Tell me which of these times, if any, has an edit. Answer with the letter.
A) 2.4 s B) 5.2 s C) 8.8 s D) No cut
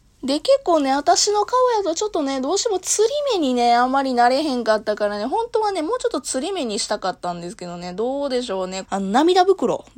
C